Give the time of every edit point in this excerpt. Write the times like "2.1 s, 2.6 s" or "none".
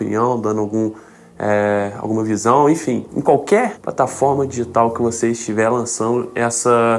3.1 s